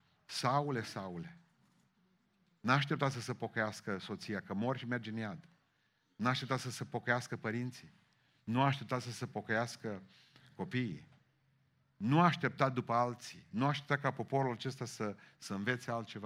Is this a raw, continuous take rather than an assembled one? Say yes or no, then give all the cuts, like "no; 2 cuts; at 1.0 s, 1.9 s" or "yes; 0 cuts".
yes; 0 cuts